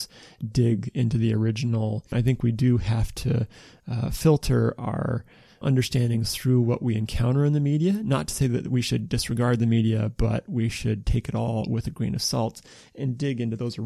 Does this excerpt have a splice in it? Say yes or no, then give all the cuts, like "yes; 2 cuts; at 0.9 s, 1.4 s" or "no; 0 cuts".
yes; 2 cuts; at 2.1 s, 5.6 s